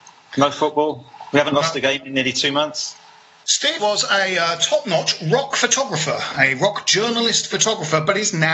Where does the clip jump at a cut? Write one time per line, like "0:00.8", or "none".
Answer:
0:03.8